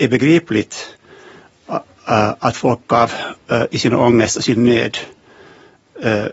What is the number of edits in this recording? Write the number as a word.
zero